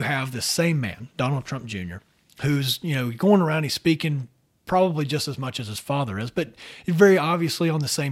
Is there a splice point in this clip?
no; 0 cuts

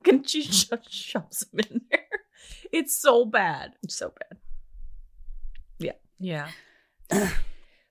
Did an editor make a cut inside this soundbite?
yes; 2 cuts; at 3.8 s, 6.1 s

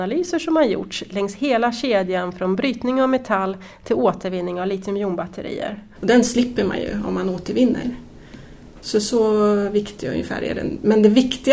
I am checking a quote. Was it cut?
yes; 1 cut; at 6.0 s

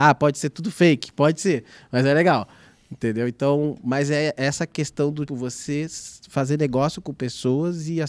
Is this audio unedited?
no; 1 cut; at 5.3 s

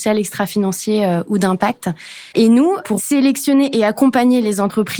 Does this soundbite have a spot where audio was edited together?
yes; 1 cut; at 2.3 s

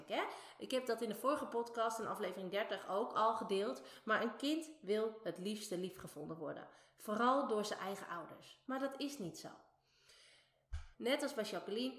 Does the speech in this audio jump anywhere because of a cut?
yes; 2 cuts; at 8.6 s, 10.9 s

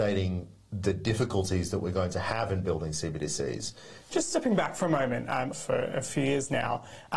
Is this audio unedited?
no; 2 cuts; at 4.0 s, 5.5 s

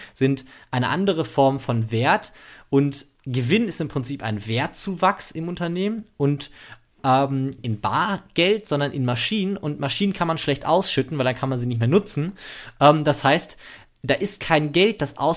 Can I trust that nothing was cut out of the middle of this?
no; 1 cut; at 7.6 s

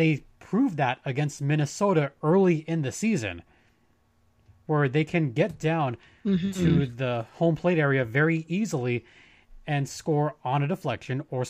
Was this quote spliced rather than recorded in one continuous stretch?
no; 0 cuts

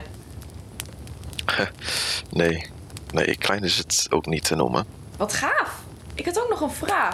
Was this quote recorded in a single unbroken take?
no; 1 cut; at 5.1 s

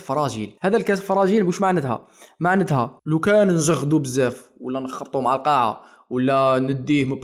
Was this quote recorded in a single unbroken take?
yes; 0 cuts

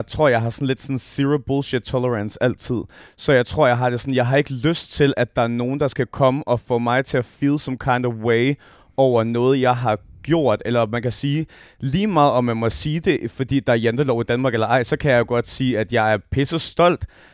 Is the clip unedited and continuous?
yes; 0 cuts

